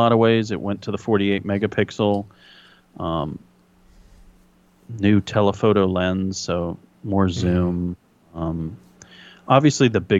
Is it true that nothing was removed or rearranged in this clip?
yes; 0 cuts

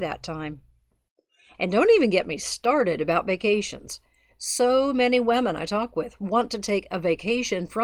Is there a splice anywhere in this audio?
no; 0 cuts

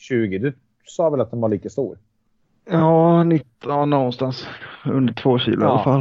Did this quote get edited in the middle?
no; 0 cuts

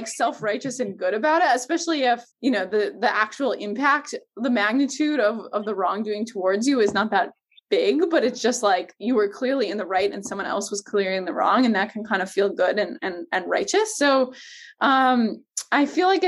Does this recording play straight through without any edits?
no; 1 cut; at 2.3 s

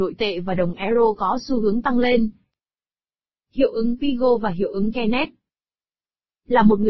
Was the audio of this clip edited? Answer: no; 0 cuts

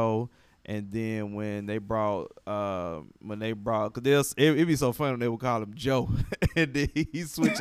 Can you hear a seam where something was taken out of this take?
no; 0 cuts

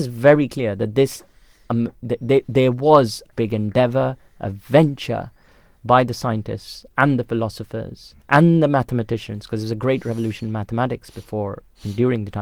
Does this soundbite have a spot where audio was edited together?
yes; 2 cuts; at 3.3 s, 8.2 s

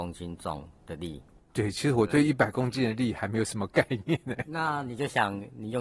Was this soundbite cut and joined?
yes; 1 cut; at 1.5 s

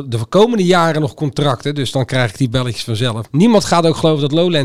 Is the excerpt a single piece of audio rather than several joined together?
no; 1 cut; at 3.3 s

